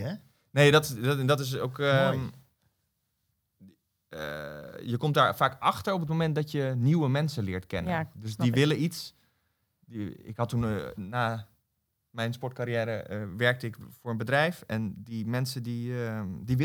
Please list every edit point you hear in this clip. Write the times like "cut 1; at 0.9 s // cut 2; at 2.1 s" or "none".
cut 1; at 10.9 s